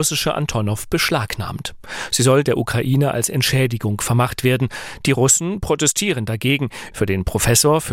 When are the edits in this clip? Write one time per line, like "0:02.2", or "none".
0:06.9